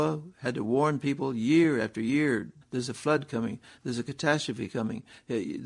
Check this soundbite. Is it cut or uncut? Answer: cut